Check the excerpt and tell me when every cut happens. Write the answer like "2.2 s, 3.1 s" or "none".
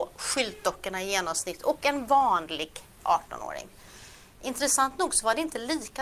none